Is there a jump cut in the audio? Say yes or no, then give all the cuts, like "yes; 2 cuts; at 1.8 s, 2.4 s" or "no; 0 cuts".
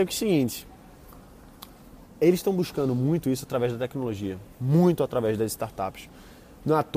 no; 0 cuts